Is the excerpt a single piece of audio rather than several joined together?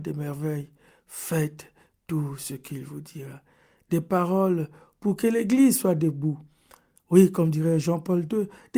yes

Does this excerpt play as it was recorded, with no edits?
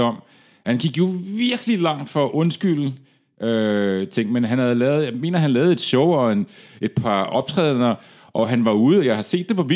no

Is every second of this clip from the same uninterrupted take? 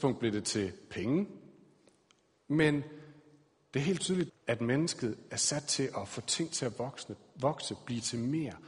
no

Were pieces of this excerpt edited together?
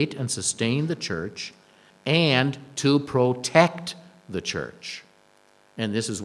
yes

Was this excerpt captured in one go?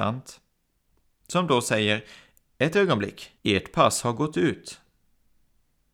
no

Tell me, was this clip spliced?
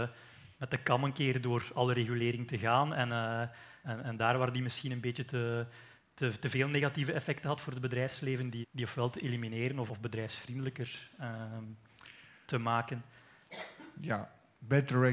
yes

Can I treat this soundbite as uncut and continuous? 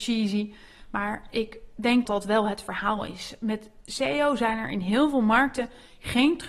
no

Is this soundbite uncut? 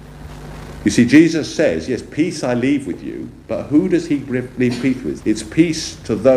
no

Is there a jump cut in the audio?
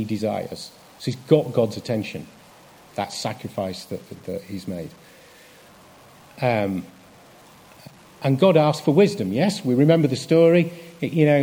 no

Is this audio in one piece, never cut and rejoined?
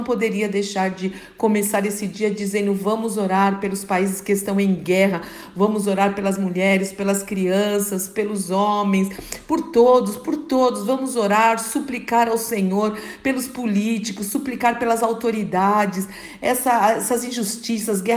yes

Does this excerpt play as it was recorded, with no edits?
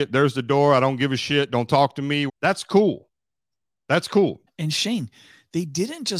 no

